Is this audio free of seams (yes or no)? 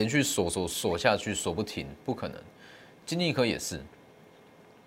yes